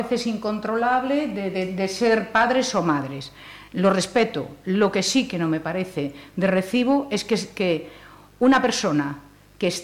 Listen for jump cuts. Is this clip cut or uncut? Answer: uncut